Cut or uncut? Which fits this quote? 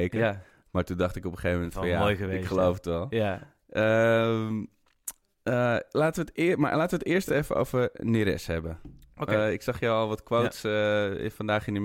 uncut